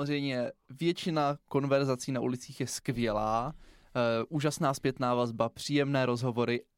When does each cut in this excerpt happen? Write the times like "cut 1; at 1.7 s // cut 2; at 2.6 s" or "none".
none